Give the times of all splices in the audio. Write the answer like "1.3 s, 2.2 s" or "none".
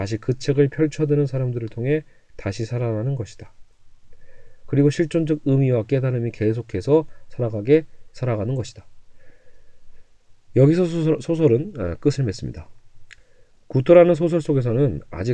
none